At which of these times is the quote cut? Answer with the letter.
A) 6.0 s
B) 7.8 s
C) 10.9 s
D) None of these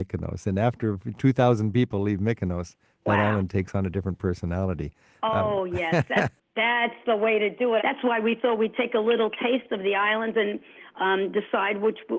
B